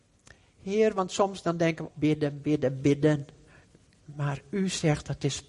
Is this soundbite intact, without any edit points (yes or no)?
no